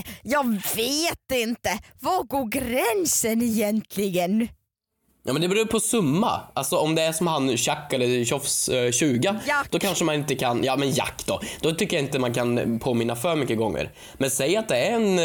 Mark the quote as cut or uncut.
uncut